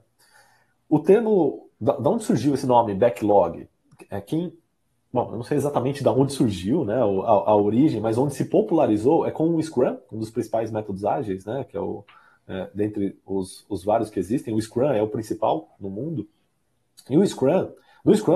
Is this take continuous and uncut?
yes; 0 cuts

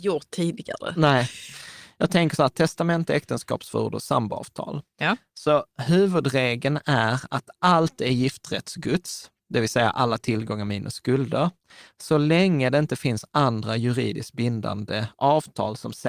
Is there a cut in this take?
no; 0 cuts

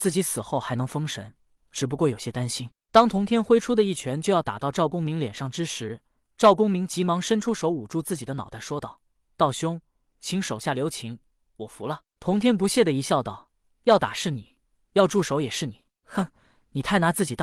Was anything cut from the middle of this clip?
yes; 1 cut; at 2.8 s

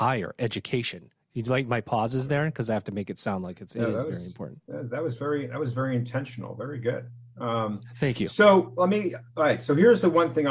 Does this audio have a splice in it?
no; 0 cuts

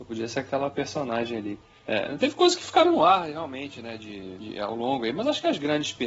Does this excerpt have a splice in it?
no; 0 cuts

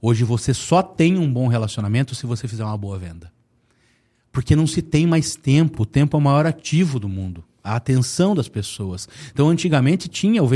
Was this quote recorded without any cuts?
yes; 0 cuts

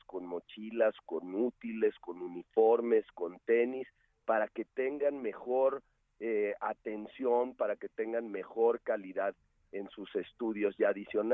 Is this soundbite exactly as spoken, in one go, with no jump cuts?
yes; 0 cuts

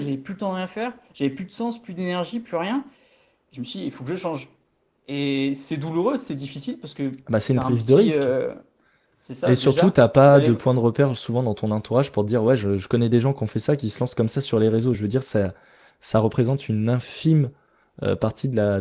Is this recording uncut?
yes; 0 cuts

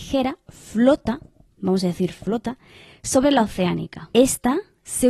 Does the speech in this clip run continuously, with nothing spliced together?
yes; 0 cuts

